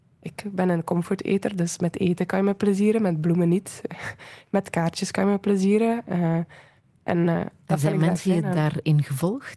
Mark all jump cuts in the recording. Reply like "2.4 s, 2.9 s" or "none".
none